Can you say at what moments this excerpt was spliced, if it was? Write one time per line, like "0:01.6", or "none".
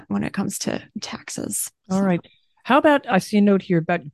0:01.8